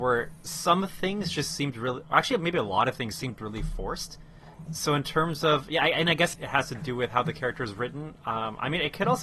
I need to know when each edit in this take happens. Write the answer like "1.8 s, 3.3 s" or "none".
4.7 s, 6.3 s